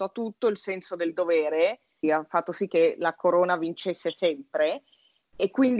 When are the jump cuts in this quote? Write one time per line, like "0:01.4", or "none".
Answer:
0:02.0